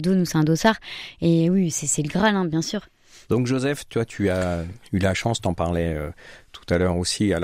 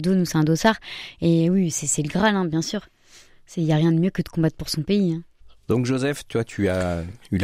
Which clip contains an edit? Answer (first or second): first